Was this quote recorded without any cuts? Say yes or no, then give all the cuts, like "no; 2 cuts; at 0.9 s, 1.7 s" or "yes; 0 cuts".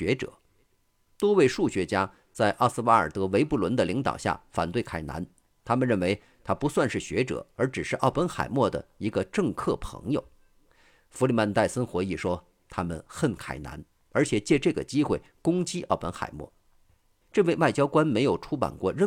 no; 1 cut; at 17.2 s